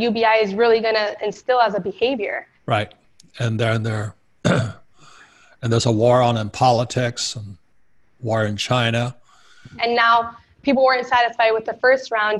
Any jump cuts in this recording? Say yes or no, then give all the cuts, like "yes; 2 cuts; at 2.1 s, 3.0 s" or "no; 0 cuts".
yes; 2 cuts; at 2.6 s, 9.8 s